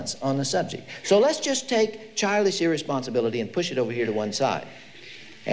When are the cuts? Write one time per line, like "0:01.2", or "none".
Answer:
none